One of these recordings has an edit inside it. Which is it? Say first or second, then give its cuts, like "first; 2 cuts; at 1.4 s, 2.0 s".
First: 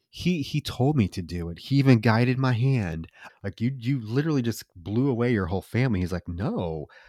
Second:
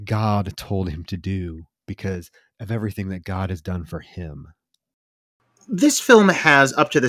first; 1 cut; at 3.3 s